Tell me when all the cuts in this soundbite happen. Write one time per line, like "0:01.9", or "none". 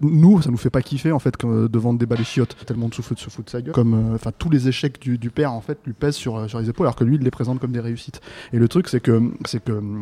0:02.6
0:03.7